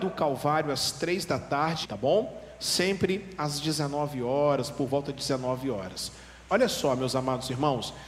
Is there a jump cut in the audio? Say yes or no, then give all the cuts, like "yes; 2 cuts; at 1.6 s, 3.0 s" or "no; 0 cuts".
yes; 2 cuts; at 1.8 s, 6.5 s